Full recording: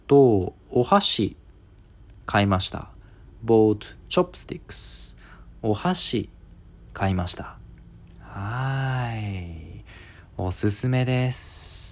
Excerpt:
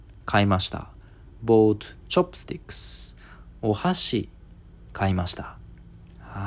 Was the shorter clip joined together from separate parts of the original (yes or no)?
no